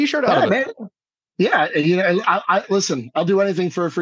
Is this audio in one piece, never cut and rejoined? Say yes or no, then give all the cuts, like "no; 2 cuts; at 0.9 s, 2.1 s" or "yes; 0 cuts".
yes; 0 cuts